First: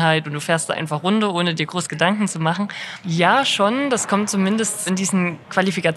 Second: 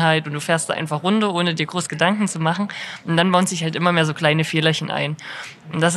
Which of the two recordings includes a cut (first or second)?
first